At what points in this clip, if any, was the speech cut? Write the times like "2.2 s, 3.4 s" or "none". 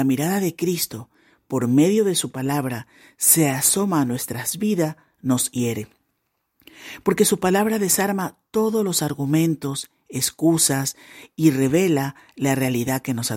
none